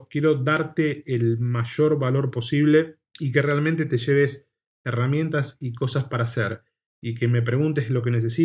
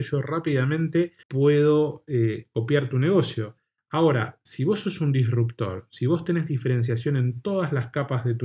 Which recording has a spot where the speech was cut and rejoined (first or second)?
second